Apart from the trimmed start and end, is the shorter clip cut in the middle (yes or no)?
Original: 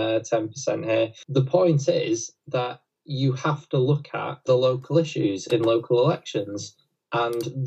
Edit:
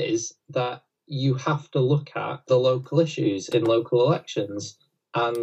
no